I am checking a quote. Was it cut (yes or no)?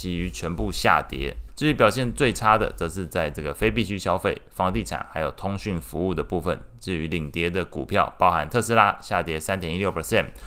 yes